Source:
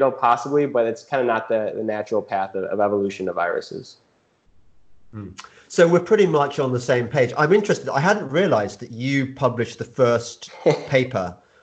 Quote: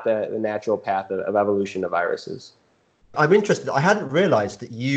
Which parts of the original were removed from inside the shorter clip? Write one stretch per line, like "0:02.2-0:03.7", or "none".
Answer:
0:04.6-0:07.3